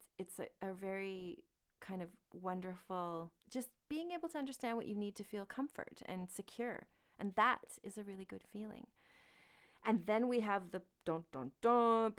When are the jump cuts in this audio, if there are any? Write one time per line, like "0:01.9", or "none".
0:03.4